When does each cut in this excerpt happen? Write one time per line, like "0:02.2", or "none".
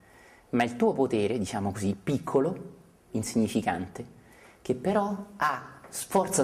none